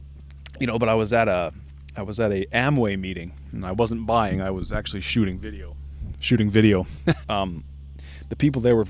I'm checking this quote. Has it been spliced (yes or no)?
yes